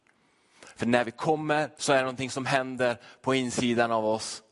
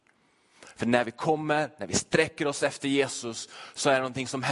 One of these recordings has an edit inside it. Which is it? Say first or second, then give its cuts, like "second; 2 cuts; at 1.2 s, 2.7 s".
first; 1 cut; at 1.8 s